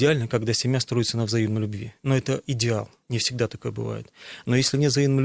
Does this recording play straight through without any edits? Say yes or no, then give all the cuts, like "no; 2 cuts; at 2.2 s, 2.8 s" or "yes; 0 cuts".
yes; 0 cuts